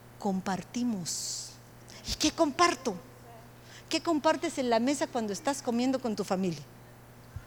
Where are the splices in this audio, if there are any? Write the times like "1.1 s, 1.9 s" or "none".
none